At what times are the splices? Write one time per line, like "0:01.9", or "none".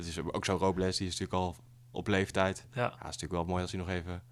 none

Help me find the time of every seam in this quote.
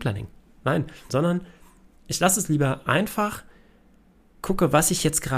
0:01.1

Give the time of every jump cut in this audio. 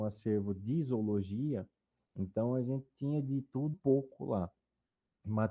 0:03.7

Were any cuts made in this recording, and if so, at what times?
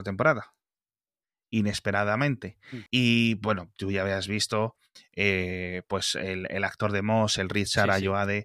0:02.9

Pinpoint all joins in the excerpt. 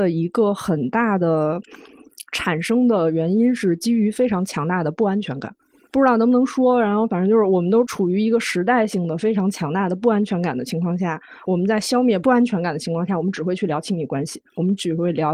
0:05.9

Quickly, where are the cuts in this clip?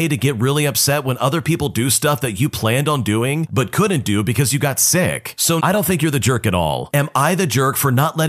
0:05.6
0:06.9

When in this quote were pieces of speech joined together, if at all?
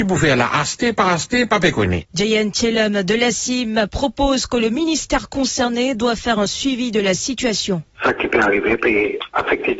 0:02.1

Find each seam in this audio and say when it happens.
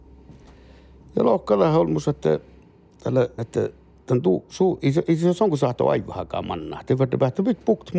0:03.4

